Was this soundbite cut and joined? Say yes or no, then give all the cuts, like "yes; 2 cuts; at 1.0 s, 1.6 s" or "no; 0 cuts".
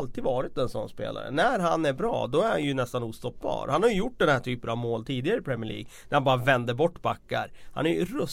no; 0 cuts